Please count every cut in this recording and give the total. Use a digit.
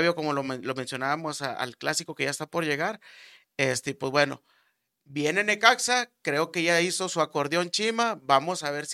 0